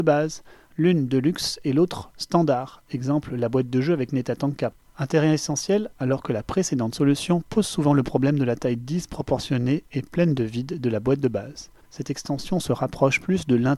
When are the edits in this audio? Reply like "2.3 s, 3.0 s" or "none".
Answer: 5.9 s, 11.8 s